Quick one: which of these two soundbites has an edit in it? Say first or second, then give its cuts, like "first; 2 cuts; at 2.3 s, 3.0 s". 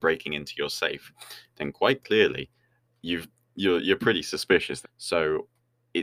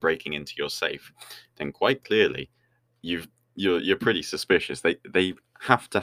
first; 1 cut; at 4.8 s